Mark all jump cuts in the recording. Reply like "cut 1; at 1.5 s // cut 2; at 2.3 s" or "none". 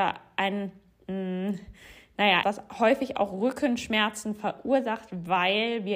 cut 1; at 2.4 s